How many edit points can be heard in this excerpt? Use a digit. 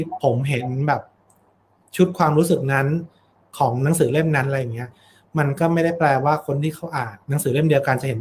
1